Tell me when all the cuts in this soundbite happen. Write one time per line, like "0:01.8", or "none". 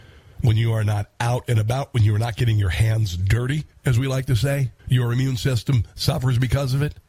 0:04.8